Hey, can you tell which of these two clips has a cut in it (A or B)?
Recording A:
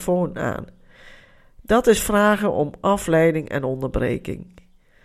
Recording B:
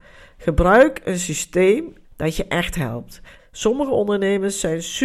B